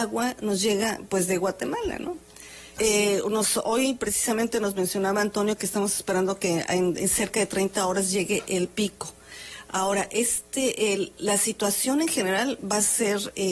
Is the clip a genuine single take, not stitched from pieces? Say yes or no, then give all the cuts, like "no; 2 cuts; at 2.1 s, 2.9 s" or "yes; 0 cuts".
no; 1 cut; at 2.8 s